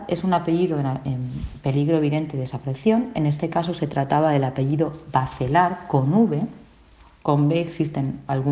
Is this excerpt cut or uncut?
uncut